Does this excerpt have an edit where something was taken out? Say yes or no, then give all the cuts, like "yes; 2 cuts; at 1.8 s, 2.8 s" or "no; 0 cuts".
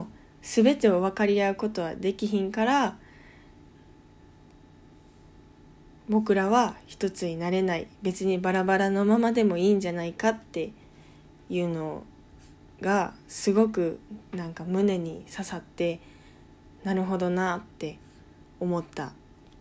no; 0 cuts